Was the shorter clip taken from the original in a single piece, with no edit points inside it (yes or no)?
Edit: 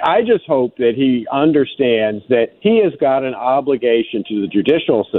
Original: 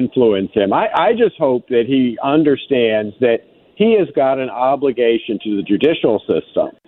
no